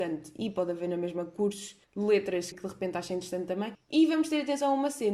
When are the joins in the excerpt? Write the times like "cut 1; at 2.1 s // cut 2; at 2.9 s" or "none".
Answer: cut 1; at 2.5 s